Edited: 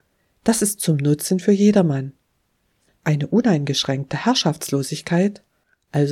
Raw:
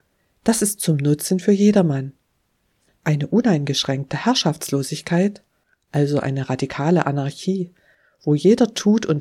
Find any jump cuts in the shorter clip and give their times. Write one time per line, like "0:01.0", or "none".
none